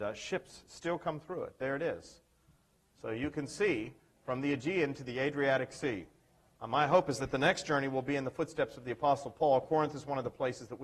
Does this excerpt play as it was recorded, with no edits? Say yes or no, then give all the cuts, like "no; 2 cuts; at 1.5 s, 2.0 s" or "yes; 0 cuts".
no; 1 cut; at 6.6 s